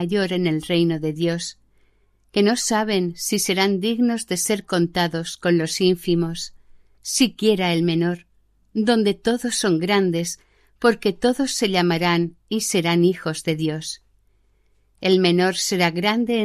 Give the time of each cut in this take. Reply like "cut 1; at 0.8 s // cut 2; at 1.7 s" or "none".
cut 1; at 7.0 s